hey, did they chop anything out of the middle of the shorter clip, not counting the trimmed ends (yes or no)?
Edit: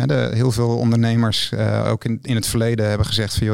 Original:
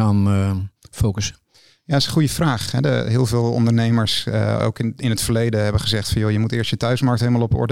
no